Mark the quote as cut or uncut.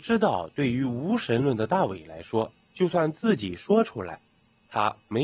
uncut